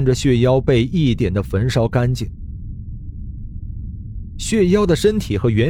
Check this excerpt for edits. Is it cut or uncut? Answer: cut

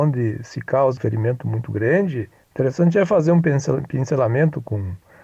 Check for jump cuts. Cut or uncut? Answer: cut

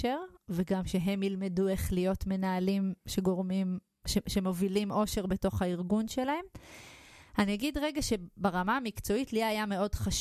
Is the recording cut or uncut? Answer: uncut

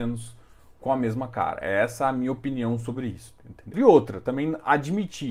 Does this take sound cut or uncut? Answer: cut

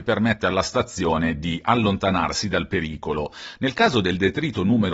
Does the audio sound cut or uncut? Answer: uncut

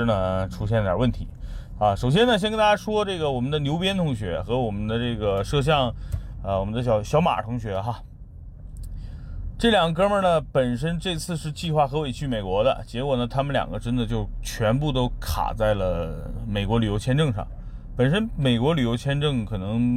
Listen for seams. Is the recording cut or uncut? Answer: uncut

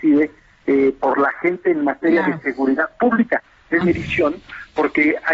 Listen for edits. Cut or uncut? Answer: cut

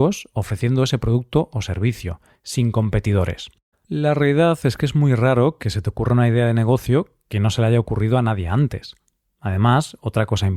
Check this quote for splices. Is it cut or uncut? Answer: cut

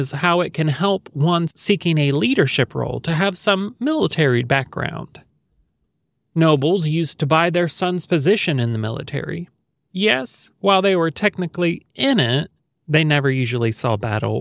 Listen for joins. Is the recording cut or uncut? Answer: uncut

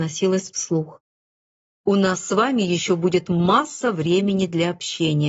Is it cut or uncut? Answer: cut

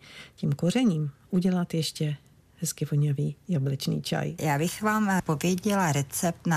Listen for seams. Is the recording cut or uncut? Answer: uncut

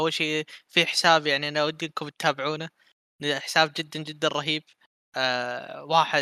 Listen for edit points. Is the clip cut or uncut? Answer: uncut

